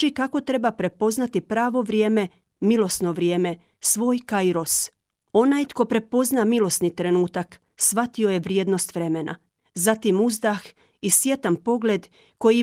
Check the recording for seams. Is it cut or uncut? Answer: cut